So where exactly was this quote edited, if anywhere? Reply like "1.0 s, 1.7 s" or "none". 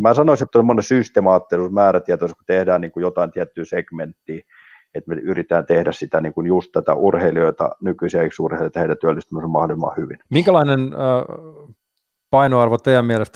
10.2 s